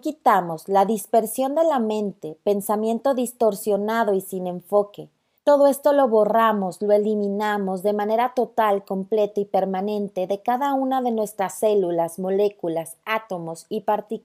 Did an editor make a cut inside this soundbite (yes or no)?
yes